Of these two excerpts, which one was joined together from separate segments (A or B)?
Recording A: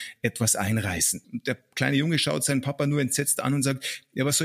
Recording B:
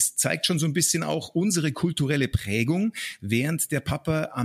A